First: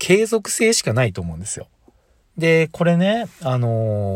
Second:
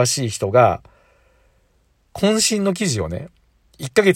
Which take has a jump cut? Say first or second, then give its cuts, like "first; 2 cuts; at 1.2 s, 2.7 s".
first; 1 cut; at 2.2 s